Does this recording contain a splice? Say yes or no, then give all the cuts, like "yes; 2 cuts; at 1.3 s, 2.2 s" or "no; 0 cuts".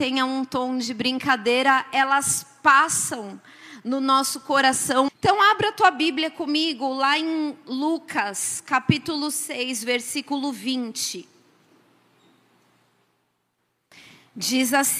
yes; 1 cut; at 5.1 s